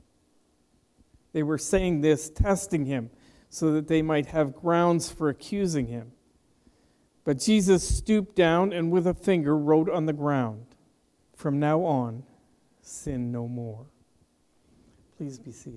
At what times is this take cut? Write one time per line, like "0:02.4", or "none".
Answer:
0:11.2